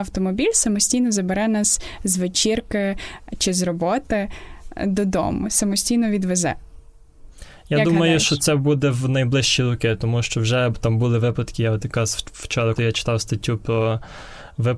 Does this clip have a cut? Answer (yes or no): yes